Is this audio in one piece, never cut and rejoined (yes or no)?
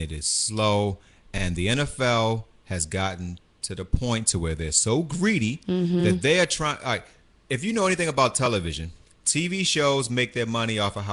yes